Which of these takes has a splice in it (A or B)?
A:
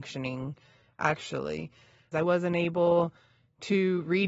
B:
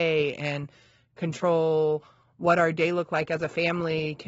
A